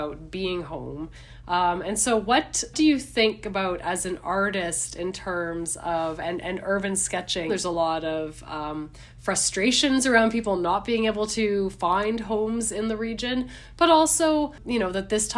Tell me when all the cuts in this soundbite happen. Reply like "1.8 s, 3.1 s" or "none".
7.5 s